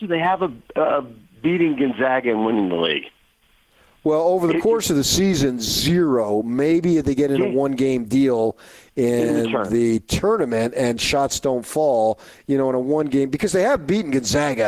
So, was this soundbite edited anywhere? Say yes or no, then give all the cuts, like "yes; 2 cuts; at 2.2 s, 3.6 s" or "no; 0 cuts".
no; 0 cuts